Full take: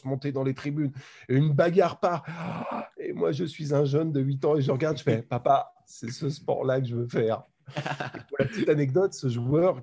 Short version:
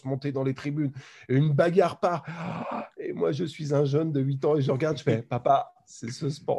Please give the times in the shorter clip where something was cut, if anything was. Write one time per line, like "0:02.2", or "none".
none